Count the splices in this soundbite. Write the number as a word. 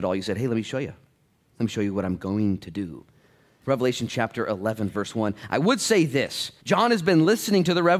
two